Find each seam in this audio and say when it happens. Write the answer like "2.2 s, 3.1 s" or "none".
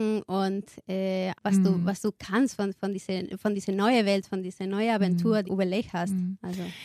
1.3 s, 5.4 s